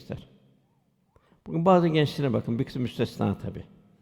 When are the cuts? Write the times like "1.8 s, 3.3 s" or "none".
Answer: none